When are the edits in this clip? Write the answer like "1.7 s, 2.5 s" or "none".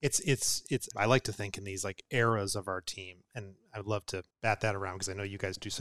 0.9 s, 4.3 s